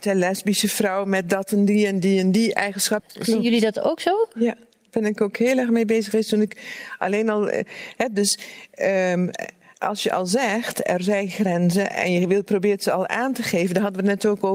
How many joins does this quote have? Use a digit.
1